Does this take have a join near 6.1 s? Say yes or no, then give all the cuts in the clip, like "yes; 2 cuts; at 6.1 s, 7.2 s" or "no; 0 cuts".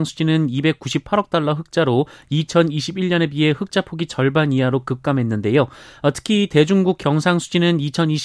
no; 0 cuts